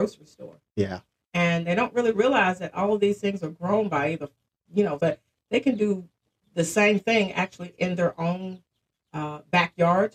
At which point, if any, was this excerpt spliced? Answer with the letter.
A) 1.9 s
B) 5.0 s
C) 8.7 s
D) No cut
B